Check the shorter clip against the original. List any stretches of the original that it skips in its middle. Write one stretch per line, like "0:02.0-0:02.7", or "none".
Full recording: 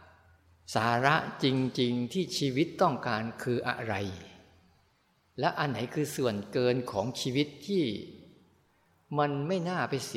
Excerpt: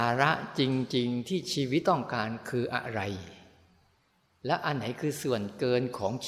0:02.7-0:02.8